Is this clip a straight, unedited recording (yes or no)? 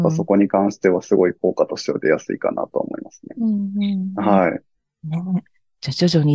yes